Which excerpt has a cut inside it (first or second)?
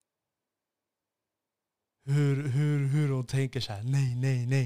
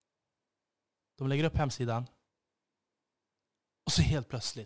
second